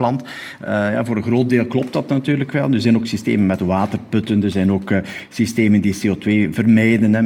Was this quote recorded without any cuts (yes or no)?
yes